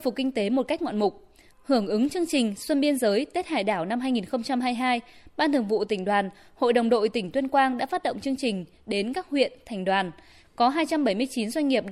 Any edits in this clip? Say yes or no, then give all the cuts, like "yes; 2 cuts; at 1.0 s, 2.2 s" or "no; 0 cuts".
yes; 2 cuts; at 1.5 s, 10.4 s